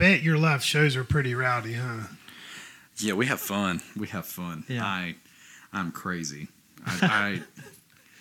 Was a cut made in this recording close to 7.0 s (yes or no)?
yes